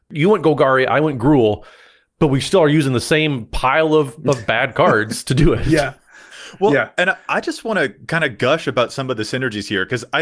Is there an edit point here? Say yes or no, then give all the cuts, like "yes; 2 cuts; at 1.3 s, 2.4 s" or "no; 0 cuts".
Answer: no; 0 cuts